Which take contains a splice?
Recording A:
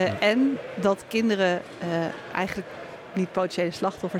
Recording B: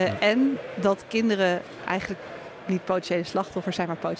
B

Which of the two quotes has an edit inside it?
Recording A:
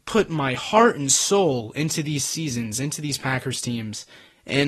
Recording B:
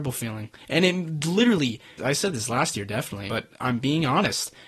B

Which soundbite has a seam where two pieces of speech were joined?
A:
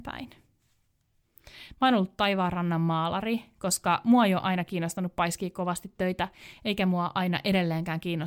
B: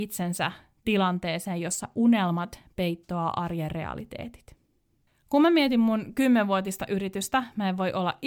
A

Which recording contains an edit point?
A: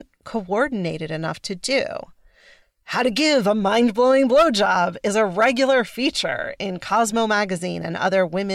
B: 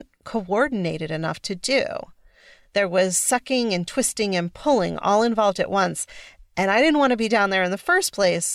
A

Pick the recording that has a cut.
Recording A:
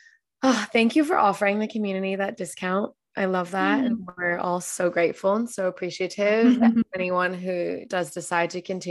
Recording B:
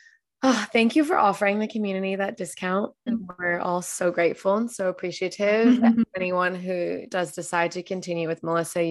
B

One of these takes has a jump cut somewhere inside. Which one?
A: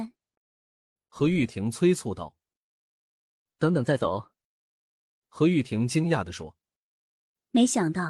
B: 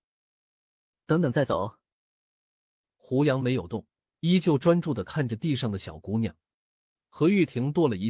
A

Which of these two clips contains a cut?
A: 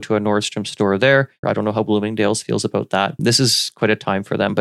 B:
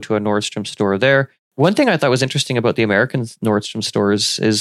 A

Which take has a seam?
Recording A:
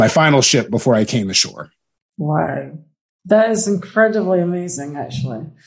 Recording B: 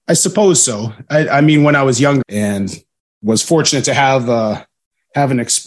B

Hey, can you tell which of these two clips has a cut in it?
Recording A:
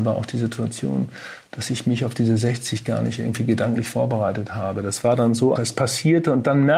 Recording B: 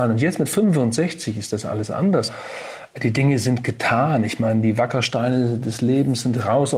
A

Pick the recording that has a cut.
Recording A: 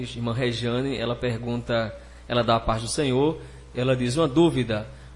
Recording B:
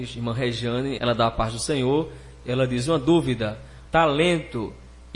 B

